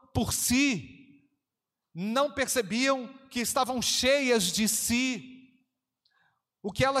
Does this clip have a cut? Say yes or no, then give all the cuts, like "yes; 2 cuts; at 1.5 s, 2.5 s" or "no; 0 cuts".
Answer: no; 0 cuts